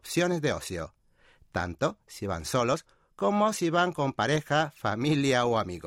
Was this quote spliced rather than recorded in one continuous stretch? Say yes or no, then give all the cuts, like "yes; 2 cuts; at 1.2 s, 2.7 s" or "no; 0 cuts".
no; 0 cuts